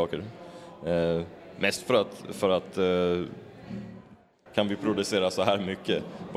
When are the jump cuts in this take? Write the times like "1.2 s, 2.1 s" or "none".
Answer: 4.5 s